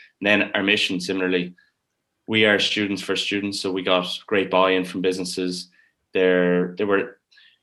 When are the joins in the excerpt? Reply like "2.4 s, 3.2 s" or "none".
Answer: none